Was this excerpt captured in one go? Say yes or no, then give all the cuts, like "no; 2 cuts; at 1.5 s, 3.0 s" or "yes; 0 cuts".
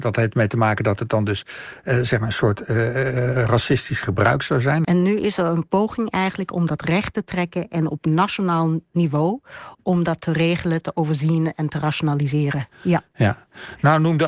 no; 2 cuts; at 4.8 s, 12.7 s